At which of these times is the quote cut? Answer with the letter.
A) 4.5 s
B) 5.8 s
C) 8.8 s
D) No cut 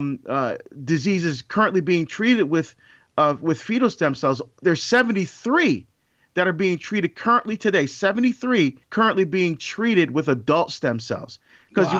C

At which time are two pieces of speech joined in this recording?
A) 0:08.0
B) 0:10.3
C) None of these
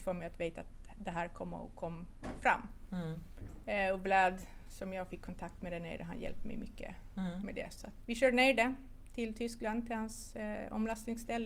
A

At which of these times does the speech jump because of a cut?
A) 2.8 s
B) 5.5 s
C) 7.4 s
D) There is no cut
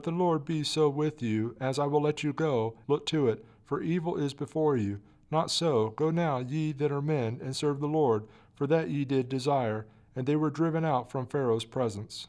A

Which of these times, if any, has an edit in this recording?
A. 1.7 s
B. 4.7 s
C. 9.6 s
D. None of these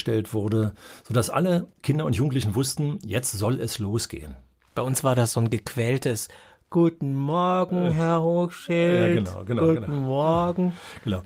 A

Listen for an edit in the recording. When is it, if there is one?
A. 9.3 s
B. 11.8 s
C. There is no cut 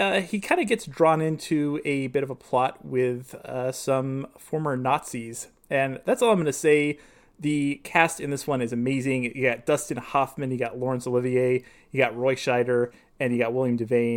C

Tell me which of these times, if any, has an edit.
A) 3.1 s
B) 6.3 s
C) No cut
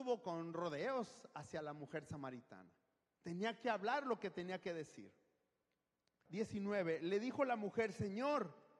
B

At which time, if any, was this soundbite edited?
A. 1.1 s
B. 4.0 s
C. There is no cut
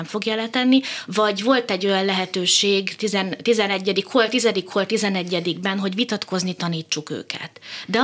A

